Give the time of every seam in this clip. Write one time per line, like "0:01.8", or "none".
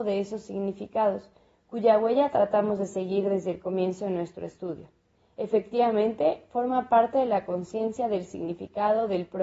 none